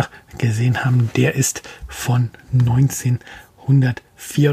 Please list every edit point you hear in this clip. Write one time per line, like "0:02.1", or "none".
none